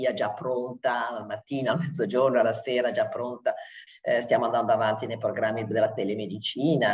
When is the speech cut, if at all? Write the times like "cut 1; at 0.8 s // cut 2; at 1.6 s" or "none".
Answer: cut 1; at 3.9 s